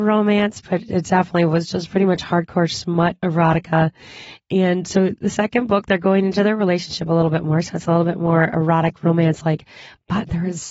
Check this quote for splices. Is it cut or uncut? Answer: uncut